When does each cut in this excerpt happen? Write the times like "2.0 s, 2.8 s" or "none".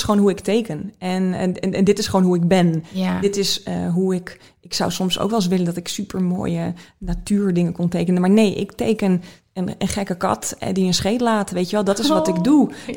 none